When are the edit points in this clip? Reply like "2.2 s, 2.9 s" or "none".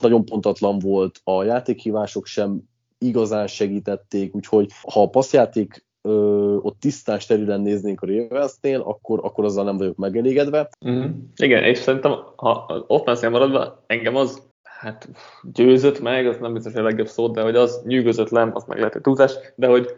4.8 s, 10.7 s, 14.5 s